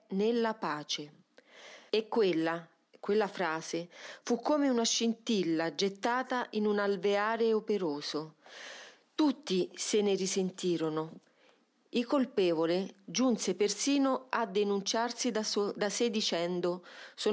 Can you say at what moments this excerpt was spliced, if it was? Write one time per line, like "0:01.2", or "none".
0:01.9

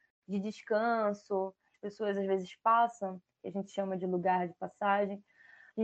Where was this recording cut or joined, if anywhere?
0:01.7

